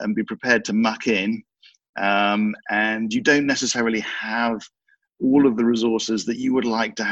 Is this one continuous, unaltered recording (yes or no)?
yes